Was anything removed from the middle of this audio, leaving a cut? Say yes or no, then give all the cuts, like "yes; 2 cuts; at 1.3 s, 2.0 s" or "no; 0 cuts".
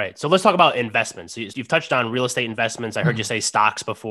yes; 1 cut; at 1.5 s